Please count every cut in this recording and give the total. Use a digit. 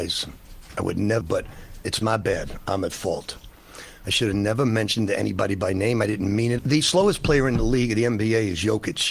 2